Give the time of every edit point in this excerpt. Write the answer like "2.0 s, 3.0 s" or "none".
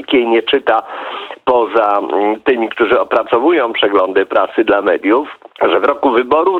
5.5 s